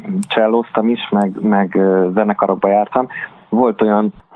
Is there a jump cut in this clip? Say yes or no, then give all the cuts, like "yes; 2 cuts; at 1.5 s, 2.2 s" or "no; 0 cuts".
no; 0 cuts